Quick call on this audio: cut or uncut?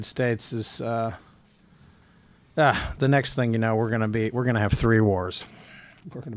uncut